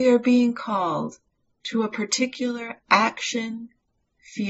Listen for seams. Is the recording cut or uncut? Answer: uncut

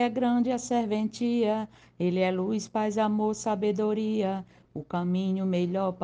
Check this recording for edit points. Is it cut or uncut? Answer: uncut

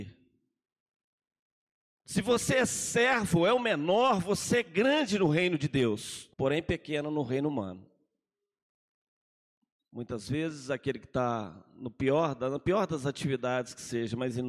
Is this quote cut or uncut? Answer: cut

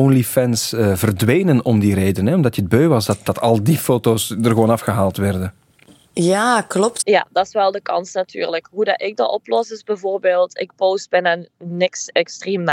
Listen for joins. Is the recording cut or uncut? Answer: cut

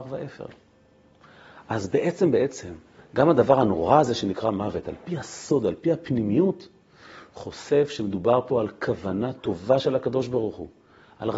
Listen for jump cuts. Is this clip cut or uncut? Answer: uncut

